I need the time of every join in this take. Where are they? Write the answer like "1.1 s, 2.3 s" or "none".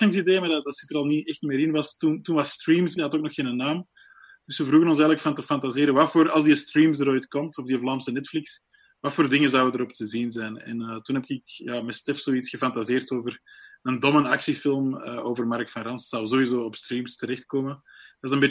3.0 s